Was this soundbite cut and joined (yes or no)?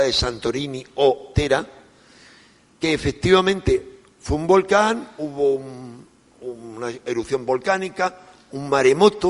no